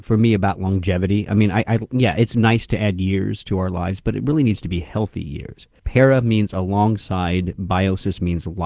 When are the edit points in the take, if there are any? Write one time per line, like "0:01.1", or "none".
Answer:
0:05.8

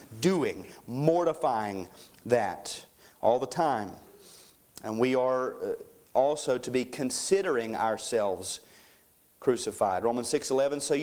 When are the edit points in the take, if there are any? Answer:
none

